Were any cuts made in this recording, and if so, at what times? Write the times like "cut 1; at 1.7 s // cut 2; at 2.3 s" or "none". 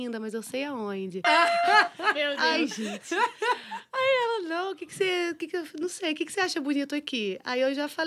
cut 1; at 1.2 s